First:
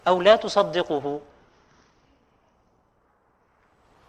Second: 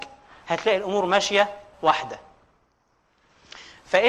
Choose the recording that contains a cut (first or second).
second